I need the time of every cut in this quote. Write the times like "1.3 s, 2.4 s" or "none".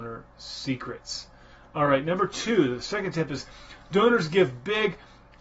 none